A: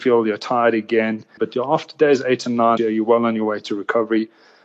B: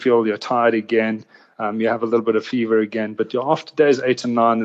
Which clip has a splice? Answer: A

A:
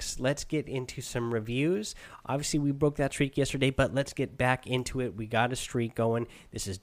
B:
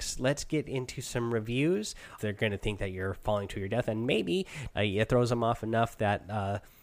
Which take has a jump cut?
B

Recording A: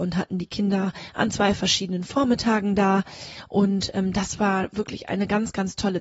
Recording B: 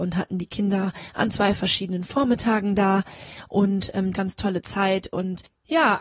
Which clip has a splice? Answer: B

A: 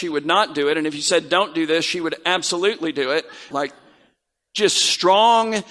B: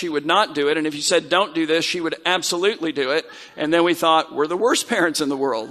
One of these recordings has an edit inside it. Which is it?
A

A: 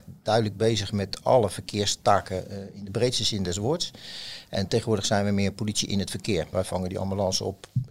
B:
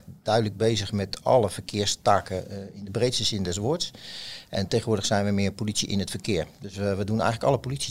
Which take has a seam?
A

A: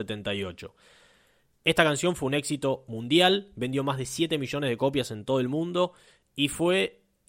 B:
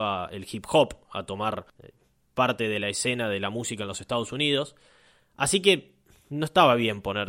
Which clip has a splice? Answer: B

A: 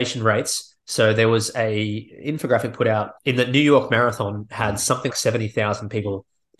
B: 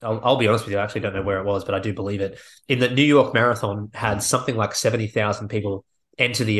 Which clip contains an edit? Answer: A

